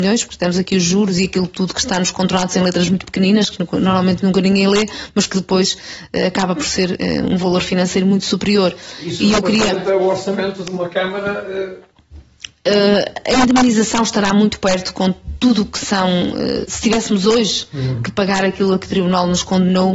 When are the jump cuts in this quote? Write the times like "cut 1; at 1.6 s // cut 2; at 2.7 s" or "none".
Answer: none